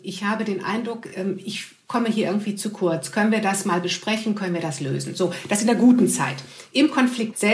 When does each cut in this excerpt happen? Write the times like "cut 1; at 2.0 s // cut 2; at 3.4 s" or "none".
none